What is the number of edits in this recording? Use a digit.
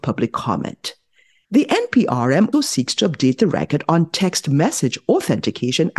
2